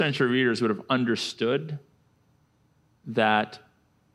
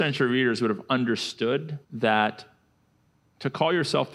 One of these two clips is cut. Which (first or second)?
second